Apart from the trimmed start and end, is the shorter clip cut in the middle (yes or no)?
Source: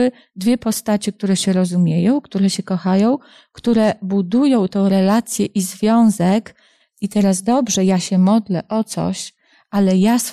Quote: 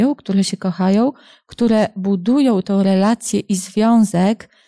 no